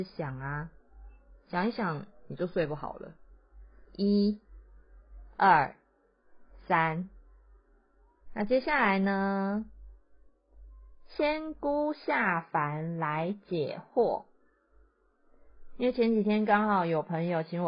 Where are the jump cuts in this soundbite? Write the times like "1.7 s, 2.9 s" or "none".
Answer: 3.8 s, 8.3 s